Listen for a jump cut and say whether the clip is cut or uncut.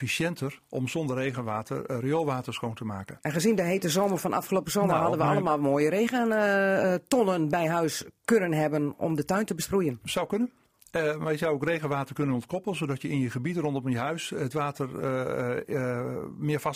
uncut